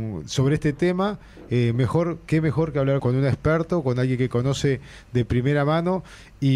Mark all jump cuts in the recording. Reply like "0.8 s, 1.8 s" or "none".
3.0 s